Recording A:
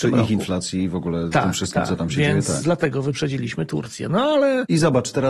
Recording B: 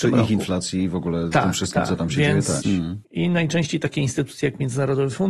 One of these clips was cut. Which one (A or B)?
B